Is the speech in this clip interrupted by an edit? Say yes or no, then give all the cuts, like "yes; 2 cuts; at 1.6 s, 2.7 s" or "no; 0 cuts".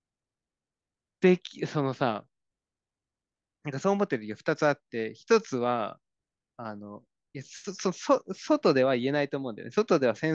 no; 0 cuts